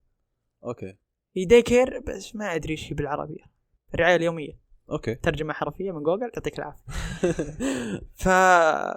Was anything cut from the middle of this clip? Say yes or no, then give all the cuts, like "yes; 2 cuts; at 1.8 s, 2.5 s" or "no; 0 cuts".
no; 0 cuts